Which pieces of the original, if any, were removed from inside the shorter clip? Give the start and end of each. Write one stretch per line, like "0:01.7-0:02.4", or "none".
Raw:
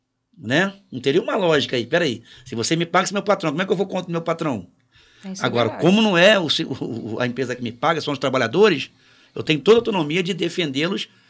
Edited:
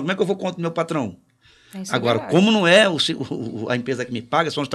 none